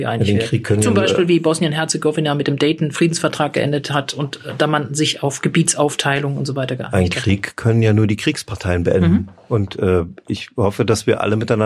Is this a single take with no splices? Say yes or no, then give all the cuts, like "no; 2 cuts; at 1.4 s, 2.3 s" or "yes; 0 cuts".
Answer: yes; 0 cuts